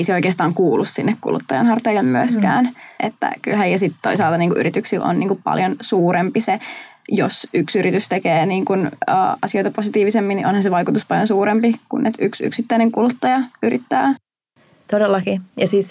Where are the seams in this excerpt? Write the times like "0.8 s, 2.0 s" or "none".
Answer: 3.0 s